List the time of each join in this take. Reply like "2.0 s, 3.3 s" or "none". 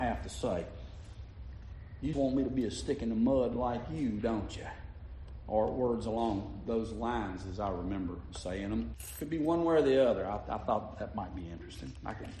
2.1 s, 8.9 s